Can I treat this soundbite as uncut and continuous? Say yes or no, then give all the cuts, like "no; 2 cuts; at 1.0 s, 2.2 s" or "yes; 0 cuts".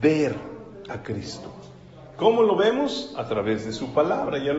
yes; 0 cuts